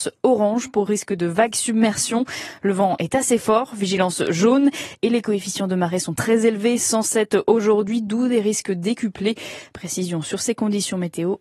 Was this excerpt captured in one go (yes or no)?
yes